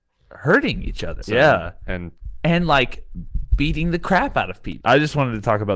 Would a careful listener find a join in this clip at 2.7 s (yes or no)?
no